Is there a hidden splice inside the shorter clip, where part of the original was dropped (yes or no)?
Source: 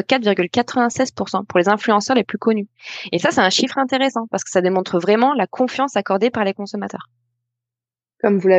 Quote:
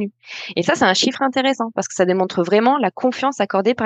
no